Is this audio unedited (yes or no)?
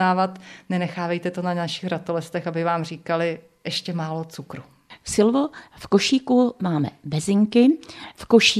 yes